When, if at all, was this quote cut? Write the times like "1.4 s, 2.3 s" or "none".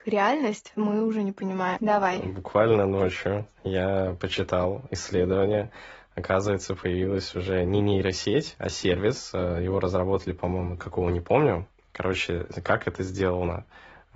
1.8 s, 10.8 s